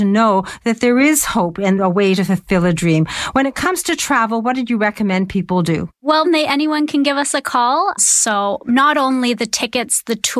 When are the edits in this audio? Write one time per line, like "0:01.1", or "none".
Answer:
0:06.2
0:08.0